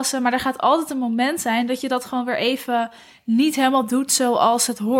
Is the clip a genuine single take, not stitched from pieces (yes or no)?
yes